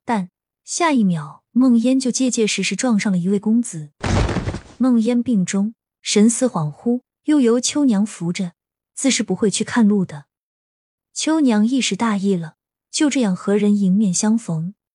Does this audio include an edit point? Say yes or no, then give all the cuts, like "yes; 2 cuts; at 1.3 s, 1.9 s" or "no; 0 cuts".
no; 0 cuts